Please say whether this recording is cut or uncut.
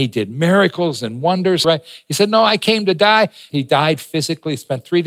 cut